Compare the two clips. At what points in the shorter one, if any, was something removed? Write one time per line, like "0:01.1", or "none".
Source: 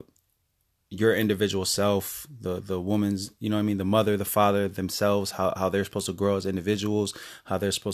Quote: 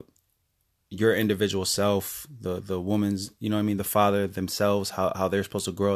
0:03.8